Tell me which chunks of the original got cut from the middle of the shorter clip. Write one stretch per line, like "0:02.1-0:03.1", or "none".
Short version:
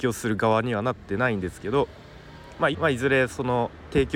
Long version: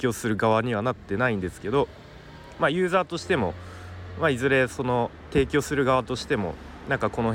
0:02.7-0:04.1